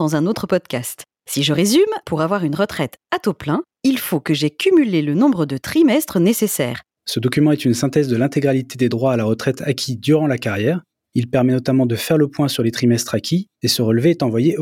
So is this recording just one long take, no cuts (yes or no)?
no